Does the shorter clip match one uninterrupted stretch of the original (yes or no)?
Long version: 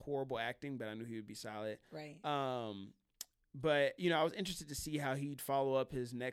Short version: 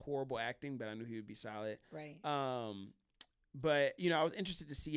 yes